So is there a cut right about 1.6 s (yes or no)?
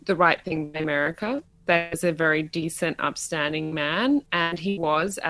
no